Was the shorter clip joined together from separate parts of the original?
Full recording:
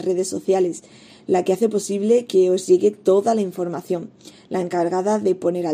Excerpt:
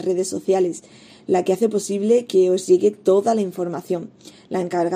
no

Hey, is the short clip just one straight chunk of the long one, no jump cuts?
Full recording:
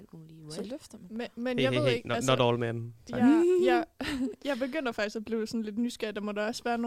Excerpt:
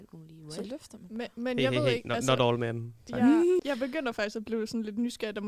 no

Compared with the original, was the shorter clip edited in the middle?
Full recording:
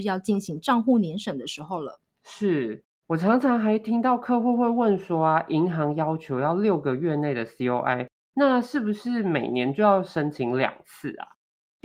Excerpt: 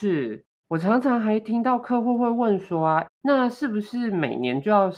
yes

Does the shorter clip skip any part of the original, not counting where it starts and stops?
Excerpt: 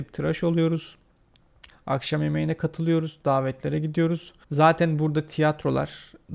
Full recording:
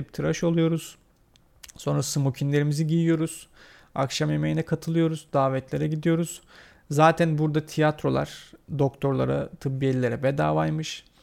yes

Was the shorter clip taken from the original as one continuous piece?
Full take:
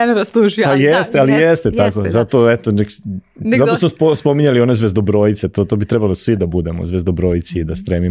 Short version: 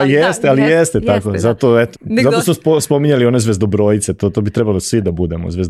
no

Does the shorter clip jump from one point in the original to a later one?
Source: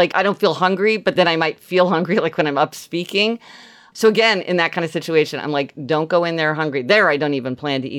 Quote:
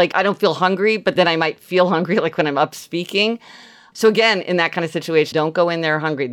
yes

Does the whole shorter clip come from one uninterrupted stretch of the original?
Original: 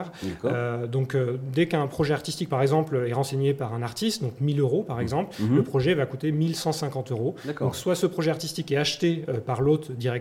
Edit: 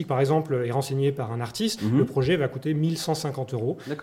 no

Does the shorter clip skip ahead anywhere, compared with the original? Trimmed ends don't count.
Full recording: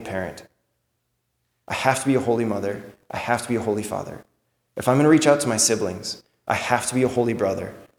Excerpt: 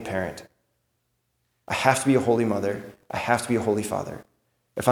no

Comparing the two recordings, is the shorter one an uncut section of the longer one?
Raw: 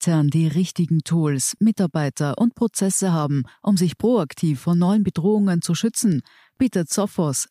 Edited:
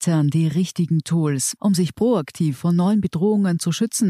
no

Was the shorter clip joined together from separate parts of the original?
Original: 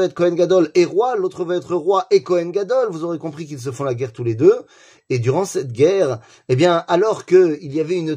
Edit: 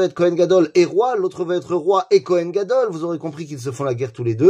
no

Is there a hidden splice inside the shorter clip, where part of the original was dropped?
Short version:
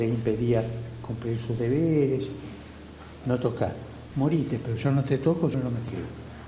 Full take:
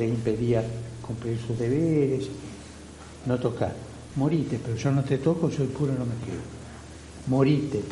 yes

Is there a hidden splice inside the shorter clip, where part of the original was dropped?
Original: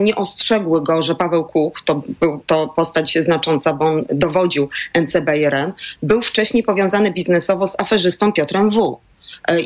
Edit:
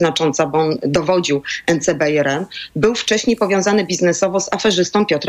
no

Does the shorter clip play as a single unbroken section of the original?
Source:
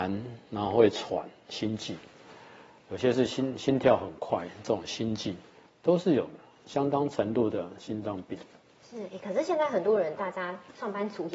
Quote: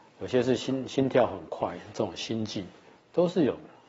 yes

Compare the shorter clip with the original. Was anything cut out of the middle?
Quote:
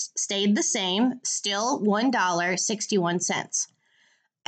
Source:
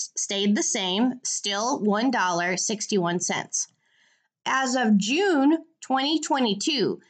no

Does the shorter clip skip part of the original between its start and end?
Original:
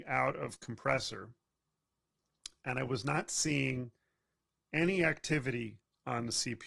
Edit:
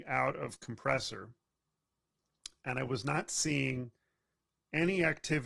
no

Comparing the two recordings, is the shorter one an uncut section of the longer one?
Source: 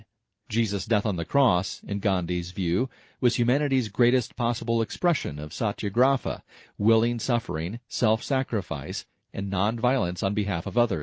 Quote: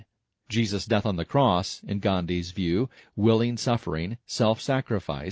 no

